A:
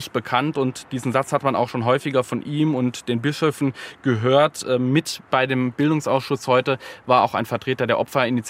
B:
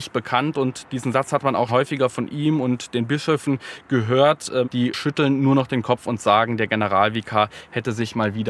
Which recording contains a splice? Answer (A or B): B